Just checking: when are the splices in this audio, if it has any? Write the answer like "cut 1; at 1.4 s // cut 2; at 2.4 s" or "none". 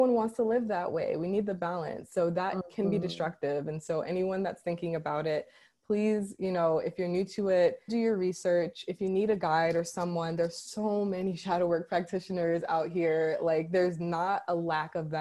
cut 1; at 7.9 s